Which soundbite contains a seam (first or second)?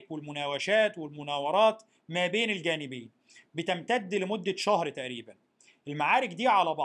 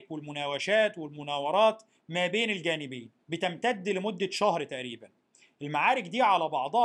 second